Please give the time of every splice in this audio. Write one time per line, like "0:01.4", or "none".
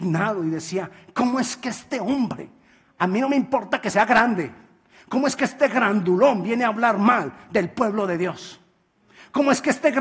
none